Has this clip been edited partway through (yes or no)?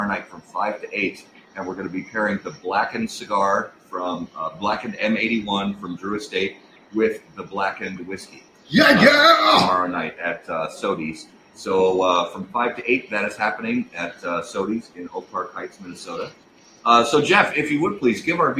no